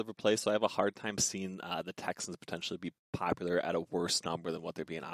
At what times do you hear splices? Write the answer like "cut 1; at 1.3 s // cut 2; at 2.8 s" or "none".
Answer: none

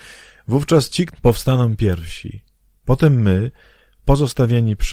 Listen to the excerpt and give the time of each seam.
cut 1; at 1.1 s

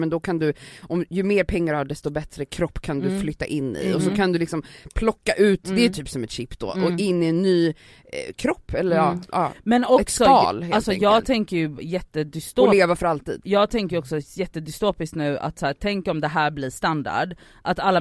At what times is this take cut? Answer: none

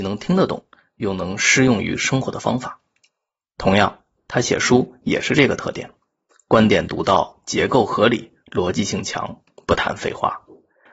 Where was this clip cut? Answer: none

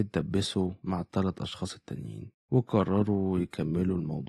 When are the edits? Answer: cut 1; at 2.4 s

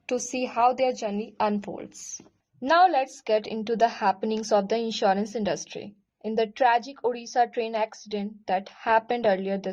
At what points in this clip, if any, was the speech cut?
none

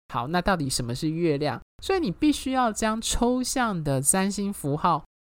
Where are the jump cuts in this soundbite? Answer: cut 1; at 1.7 s

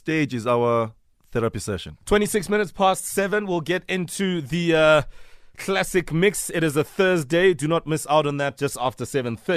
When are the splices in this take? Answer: cut 1; at 2.0 s

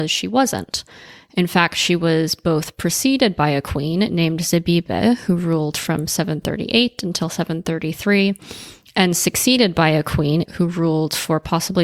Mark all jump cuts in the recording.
cut 1; at 10.5 s

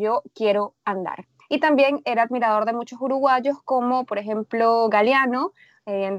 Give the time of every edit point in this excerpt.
cut 1; at 1.4 s

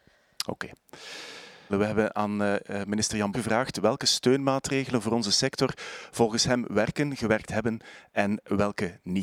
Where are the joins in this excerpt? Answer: cut 1; at 1.7 s // cut 2; at 3.3 s

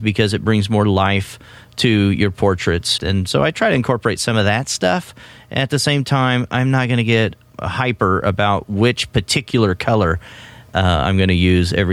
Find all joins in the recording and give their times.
cut 1; at 3.0 s

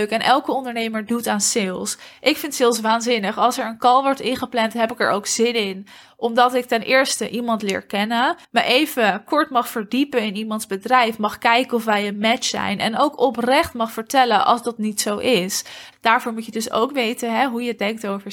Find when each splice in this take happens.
cut 1; at 8.4 s // cut 2; at 15.9 s

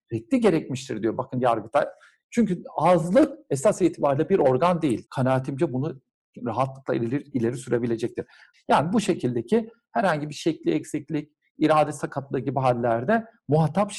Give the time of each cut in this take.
cut 1; at 5.1 s // cut 2; at 8.5 s

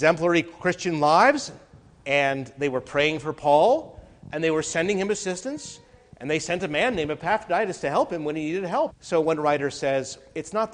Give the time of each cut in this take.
cut 1; at 8.9 s

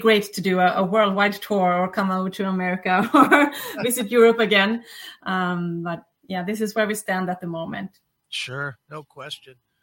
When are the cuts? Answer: none

